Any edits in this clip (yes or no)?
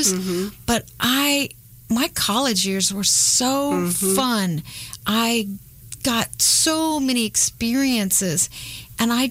no